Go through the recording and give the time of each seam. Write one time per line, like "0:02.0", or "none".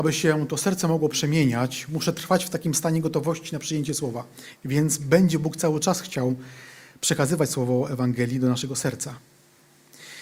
0:04.6